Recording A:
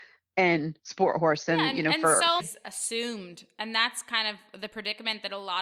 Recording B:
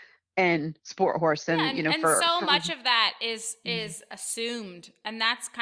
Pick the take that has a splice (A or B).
A